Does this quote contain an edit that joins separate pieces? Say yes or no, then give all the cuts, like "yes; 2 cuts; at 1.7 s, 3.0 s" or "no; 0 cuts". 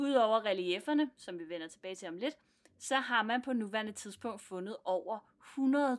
no; 0 cuts